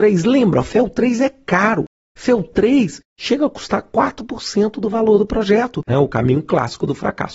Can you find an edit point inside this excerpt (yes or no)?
yes